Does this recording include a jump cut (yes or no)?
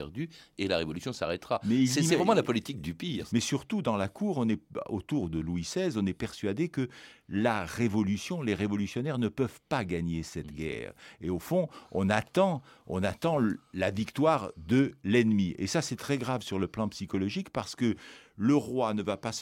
yes